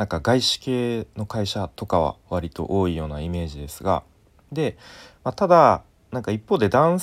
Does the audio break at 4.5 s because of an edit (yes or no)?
yes